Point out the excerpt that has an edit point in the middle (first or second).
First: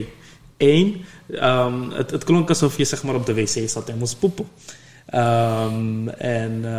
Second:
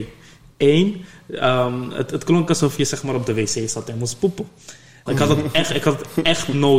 second